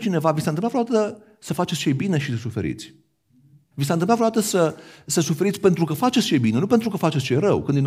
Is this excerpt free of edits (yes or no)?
yes